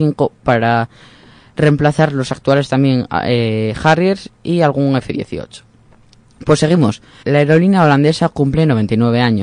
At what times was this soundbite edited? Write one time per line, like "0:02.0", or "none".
0:07.2

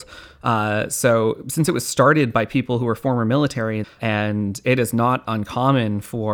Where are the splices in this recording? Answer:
0:03.8

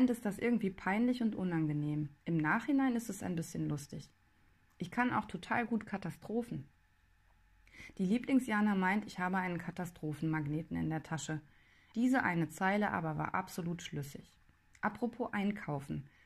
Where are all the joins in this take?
0:11.9
0:14.7

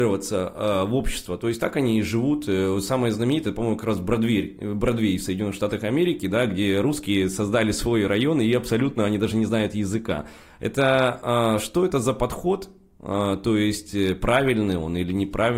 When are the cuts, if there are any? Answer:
none

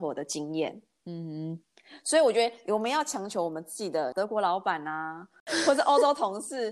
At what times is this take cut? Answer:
0:04.1

